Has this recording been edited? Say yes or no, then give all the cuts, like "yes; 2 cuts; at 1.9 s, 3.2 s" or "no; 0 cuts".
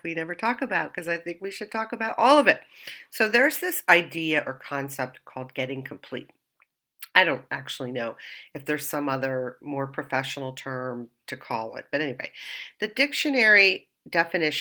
no; 0 cuts